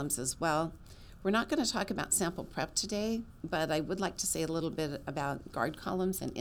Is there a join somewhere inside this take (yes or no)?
no